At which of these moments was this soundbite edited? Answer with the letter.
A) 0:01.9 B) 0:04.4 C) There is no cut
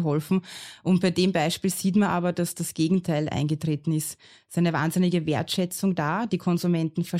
C